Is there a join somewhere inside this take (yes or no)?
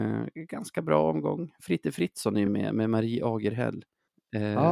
no